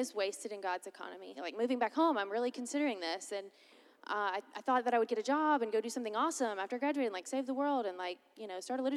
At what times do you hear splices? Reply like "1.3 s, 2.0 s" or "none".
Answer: 1.3 s